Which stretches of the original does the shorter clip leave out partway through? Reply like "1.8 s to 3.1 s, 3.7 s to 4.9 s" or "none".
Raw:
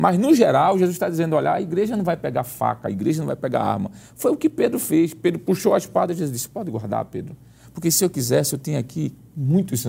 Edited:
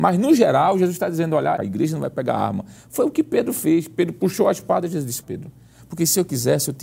1.6 s to 2.8 s, 6.5 s to 7.1 s